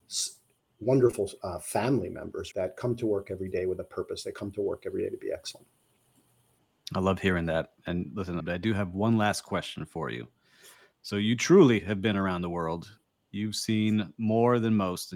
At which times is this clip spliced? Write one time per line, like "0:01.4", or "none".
0:02.5
0:08.4